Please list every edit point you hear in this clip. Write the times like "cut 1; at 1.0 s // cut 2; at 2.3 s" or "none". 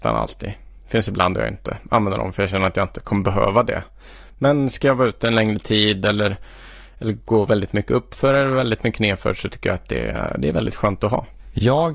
none